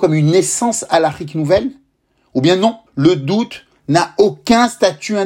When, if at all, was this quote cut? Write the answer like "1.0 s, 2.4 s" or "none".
2.9 s